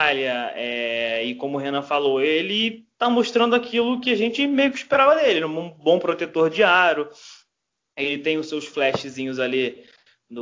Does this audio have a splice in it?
no; 0 cuts

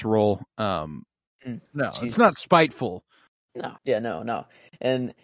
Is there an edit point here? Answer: yes; 2 cuts; at 1.7 s, 3.8 s

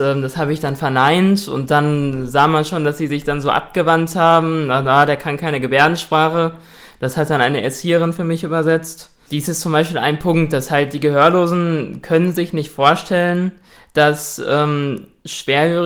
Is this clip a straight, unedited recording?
yes; 0 cuts

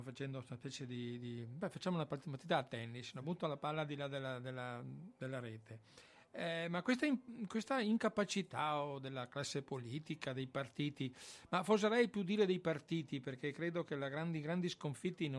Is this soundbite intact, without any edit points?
yes; 0 cuts

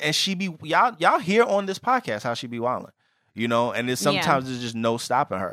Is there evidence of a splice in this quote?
no; 0 cuts

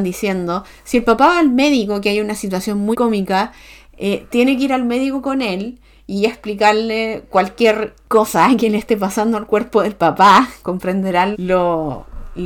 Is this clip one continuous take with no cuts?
no; 2 cuts; at 2.9 s, 11.3 s

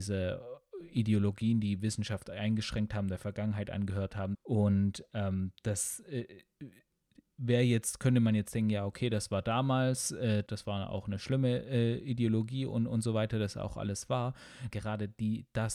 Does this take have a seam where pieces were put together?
yes; 3 cuts; at 4.3 s, 10.5 s, 14.7 s

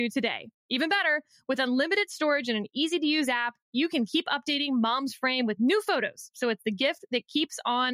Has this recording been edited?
no; 0 cuts

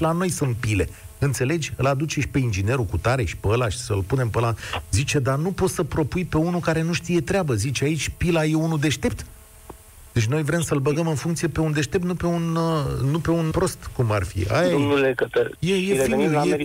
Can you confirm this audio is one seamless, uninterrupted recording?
no; 2 cuts; at 13.5 s, 15.6 s

